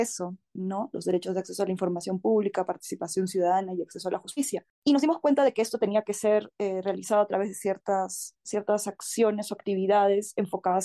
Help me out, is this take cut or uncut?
uncut